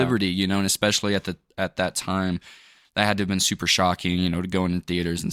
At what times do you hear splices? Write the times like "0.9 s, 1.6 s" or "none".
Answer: none